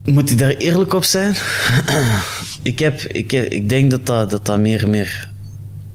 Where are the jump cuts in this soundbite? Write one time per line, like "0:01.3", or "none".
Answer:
none